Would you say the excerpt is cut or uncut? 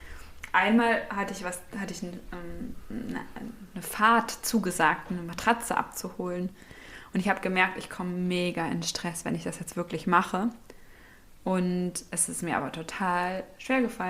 uncut